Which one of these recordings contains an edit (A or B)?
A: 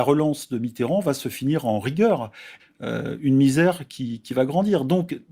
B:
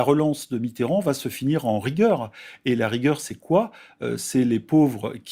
A